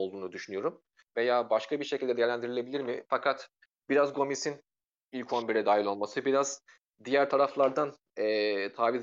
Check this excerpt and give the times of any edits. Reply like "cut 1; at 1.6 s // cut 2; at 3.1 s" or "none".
cut 1; at 1.1 s // cut 2; at 3.1 s